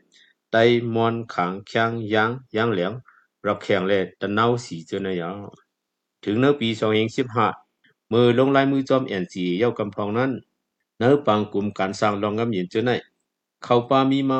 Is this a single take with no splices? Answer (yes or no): yes